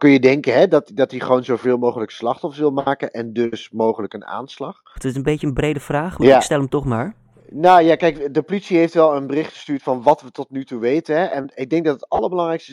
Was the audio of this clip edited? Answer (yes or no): yes